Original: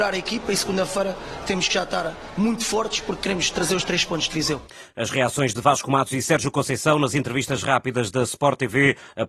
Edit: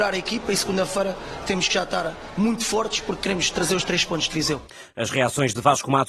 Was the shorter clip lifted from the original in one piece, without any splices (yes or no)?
yes